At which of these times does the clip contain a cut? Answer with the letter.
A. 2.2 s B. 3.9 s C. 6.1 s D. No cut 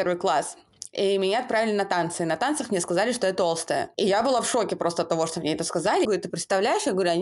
C